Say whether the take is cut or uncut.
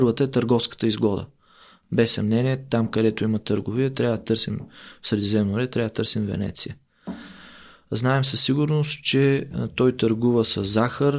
uncut